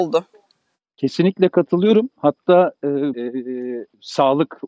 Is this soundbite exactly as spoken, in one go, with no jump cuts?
no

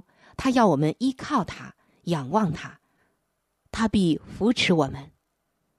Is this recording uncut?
no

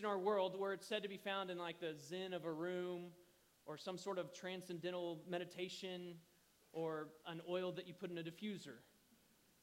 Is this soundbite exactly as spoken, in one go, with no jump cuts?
yes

